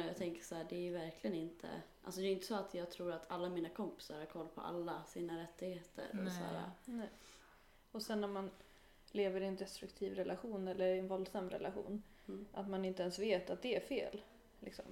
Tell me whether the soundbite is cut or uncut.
uncut